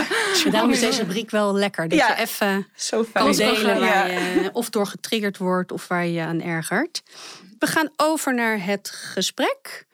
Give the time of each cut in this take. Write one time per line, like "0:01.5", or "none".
none